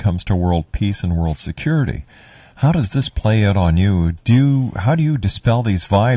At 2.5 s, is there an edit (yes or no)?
no